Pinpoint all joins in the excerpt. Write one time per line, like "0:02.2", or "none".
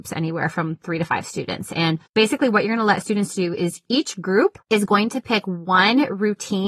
0:02.1
0:04.6